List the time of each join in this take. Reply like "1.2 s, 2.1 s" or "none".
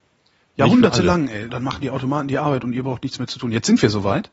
1.5 s